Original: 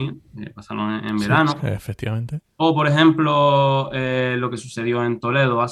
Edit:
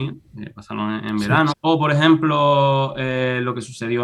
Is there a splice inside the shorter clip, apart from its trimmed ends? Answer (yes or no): yes